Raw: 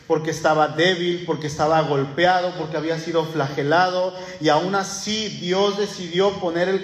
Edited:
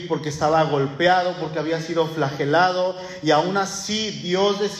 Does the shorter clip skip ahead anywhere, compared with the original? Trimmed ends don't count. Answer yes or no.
no